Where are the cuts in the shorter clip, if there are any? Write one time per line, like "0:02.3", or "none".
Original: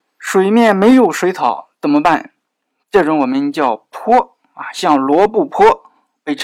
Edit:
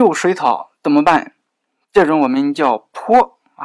none